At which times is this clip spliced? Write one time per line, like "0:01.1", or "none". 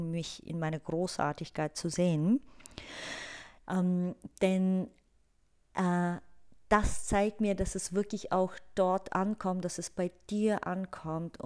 0:03.6

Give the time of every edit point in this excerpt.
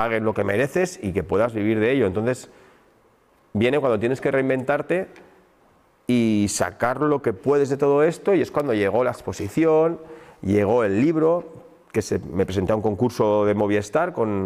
none

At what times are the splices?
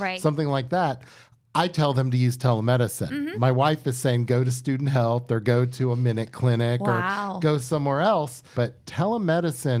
0:08.5

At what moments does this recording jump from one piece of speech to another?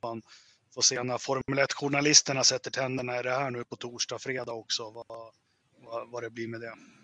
none

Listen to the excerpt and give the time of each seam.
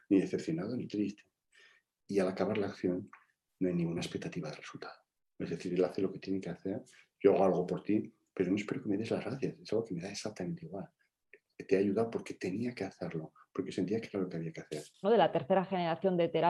0:15.0

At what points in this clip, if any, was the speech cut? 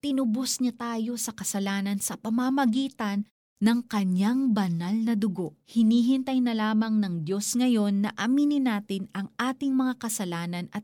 0:05.6

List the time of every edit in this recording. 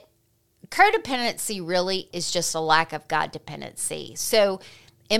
0:02.1

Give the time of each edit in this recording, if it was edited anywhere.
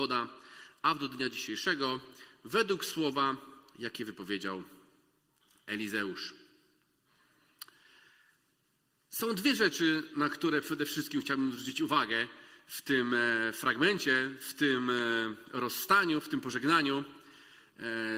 none

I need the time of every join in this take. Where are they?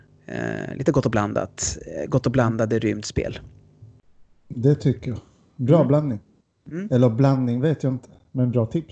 none

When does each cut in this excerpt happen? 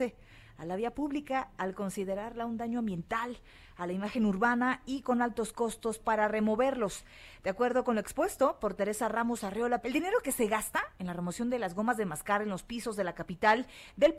0:09.8

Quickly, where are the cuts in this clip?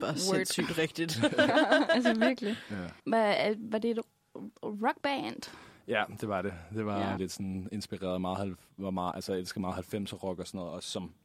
0:03.0
0:07.2

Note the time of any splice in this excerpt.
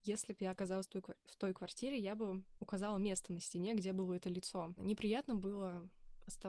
0:04.8

